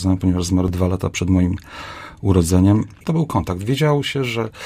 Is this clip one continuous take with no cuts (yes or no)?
no